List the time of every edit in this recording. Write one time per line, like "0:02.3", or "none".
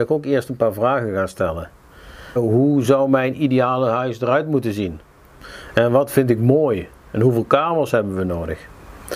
0:02.4

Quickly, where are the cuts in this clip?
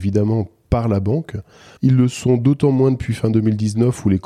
0:01.8

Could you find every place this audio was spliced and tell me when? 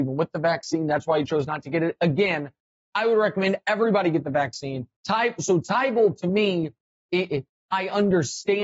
0:05.0

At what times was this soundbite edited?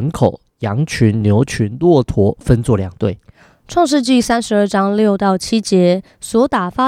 none

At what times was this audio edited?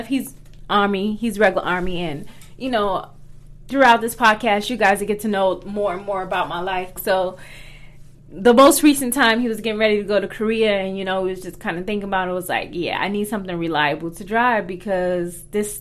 0:07.0

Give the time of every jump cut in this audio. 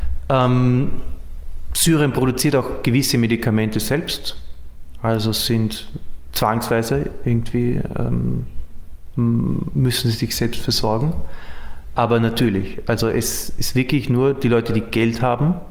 none

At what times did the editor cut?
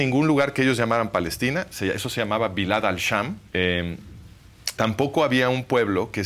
0:03.5
0:04.8

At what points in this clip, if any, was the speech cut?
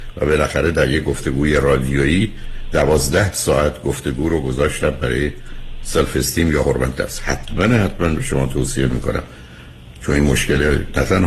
none

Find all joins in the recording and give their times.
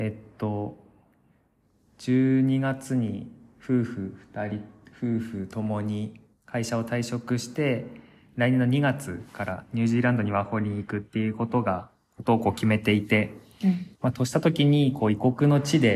0:13.9

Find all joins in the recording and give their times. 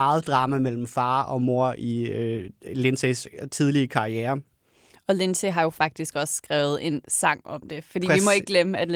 none

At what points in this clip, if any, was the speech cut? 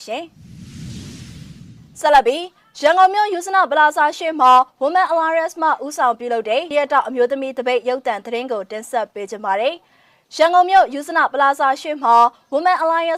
0:06.7

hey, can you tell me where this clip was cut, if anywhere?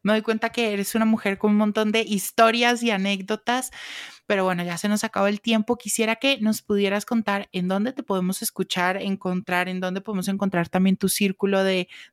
none

